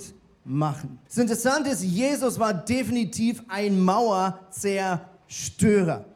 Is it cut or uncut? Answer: cut